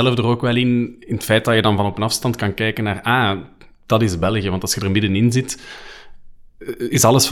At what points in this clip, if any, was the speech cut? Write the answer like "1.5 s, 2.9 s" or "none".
none